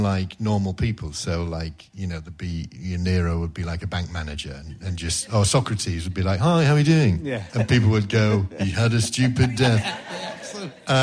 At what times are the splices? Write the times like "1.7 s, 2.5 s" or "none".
7.5 s